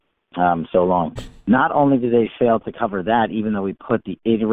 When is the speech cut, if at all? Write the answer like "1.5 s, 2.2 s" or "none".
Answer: 1.2 s

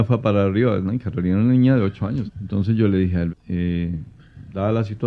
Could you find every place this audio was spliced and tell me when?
2.3 s, 3.3 s

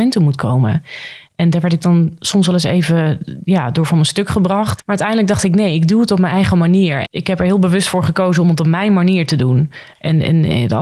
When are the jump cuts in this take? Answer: 4.8 s, 7.0 s

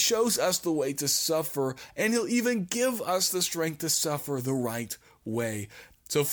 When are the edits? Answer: none

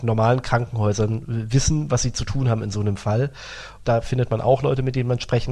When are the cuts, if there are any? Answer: 3.8 s

